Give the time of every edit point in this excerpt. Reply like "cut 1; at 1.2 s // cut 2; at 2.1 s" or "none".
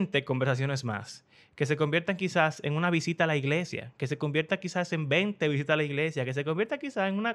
none